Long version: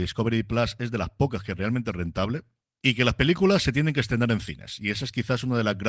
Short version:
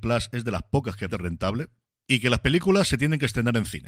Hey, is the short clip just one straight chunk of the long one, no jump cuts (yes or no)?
no